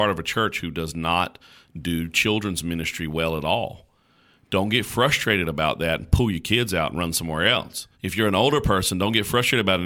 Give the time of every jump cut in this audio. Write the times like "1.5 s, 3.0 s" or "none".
7.9 s